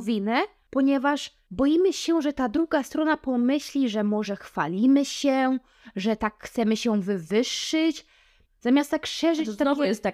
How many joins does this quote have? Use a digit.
1